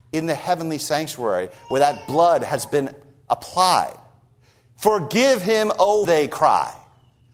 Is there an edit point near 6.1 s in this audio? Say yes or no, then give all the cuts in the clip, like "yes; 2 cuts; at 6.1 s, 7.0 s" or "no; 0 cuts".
yes; 1 cut; at 6.1 s